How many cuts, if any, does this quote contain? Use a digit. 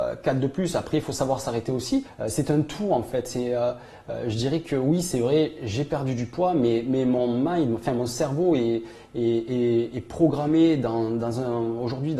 0